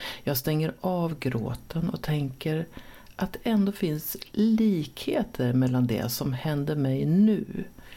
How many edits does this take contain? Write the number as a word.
zero